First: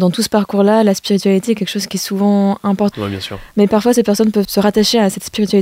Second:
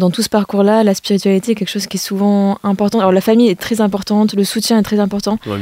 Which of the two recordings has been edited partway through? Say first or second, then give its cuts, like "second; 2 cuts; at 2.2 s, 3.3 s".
first; 2 cuts; at 2.9 s, 4.4 s